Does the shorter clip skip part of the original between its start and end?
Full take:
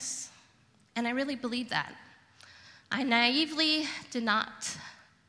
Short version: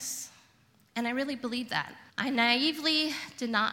yes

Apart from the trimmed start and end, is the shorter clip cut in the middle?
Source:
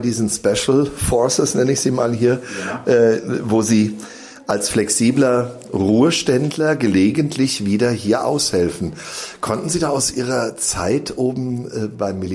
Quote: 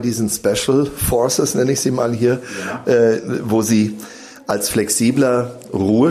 no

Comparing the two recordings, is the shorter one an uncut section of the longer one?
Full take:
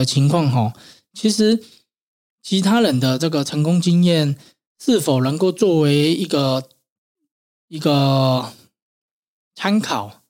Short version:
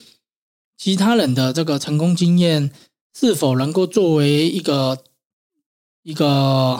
yes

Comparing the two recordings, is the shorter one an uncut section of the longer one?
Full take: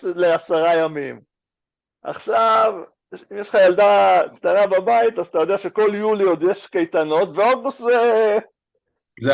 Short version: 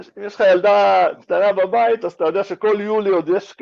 yes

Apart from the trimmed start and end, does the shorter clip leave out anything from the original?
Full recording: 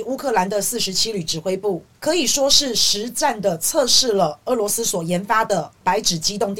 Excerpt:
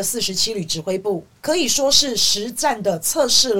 no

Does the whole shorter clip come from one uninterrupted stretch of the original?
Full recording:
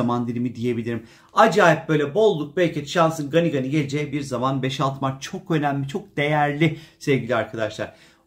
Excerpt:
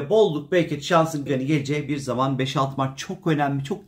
no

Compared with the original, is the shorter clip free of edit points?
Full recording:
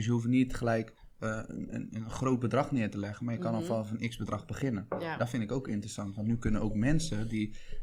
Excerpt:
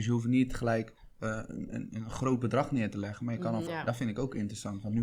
no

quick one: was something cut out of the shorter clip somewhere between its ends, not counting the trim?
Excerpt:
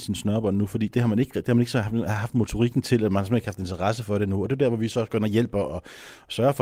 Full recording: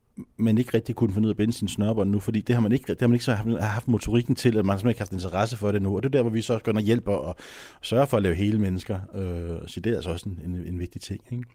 no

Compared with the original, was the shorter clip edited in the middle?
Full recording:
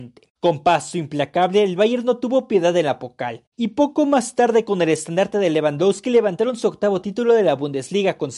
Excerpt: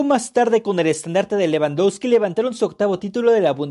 no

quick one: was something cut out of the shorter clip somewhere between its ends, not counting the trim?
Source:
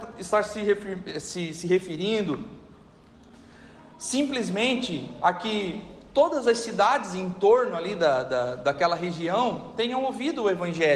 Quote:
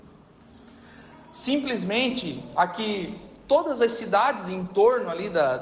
no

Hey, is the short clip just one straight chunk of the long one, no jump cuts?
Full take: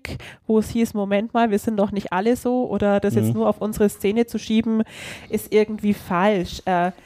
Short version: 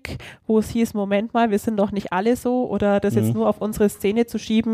yes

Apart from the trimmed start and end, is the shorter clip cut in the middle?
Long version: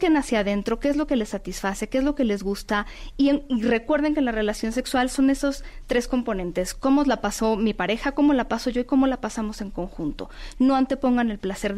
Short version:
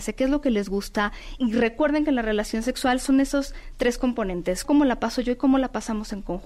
yes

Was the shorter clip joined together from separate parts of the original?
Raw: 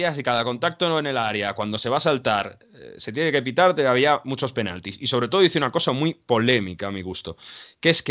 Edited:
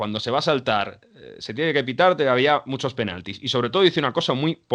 no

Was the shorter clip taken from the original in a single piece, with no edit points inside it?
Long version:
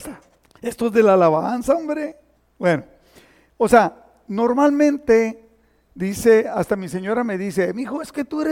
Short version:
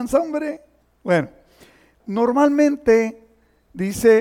no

